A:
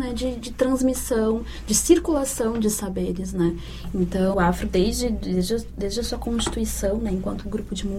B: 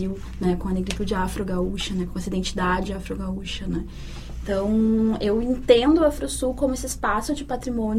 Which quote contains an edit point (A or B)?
A